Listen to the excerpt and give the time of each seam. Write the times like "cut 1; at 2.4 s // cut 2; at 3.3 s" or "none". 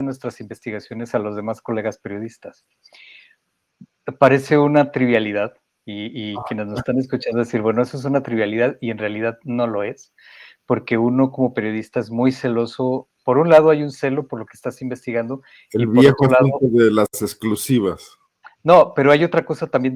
none